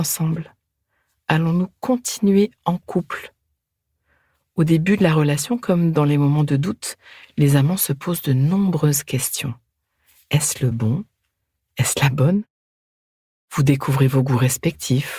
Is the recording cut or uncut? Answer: uncut